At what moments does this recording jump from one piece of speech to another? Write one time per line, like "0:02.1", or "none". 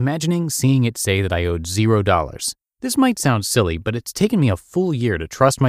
0:02.6